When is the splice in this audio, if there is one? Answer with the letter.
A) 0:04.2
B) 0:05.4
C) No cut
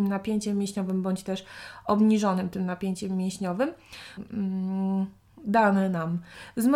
A